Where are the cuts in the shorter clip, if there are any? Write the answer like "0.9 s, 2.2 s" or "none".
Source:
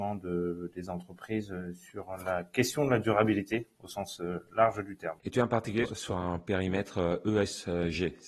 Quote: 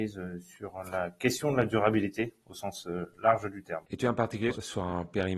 none